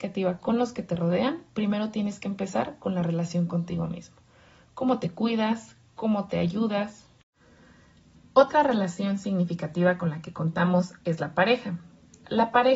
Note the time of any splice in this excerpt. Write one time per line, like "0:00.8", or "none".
none